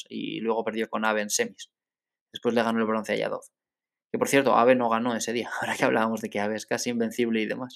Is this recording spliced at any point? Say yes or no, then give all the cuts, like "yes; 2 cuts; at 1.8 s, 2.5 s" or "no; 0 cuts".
no; 0 cuts